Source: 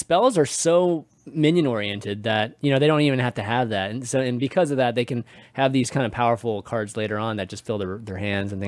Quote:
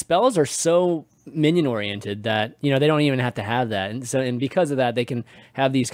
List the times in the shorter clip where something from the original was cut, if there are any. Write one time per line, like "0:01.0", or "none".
none